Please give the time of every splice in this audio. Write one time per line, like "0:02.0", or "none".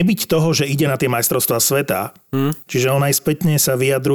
0:02.7